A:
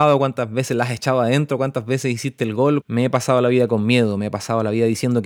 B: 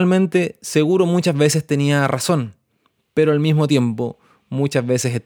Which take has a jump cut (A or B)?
A